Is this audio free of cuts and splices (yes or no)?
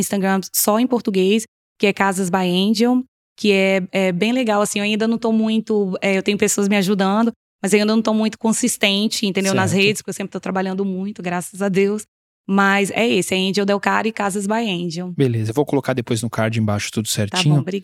yes